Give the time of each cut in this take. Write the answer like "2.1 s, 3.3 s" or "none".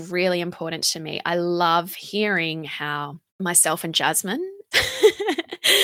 3.3 s, 4.7 s